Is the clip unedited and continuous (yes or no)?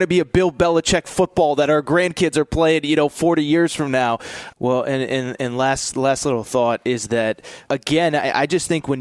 no